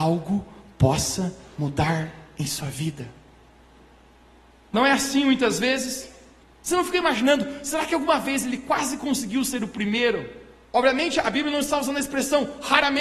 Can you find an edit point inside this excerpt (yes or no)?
yes